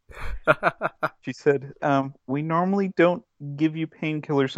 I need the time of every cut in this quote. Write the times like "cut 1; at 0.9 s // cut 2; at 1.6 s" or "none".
cut 1; at 1.8 s